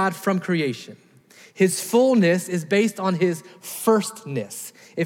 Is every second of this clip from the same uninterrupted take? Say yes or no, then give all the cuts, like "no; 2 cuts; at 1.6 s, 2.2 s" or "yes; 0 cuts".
yes; 0 cuts